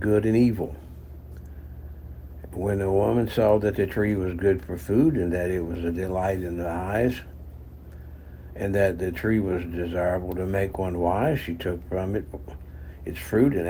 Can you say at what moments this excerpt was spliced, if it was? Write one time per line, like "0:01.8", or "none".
none